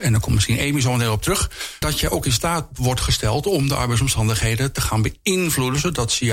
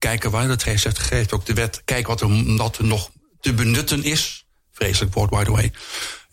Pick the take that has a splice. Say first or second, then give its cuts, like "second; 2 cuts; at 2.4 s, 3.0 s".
first; 1 cut; at 1.8 s